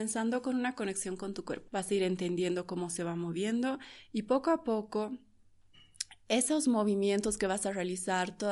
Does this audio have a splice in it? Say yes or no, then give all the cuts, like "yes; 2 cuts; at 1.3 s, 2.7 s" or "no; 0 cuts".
yes; 1 cut; at 1.7 s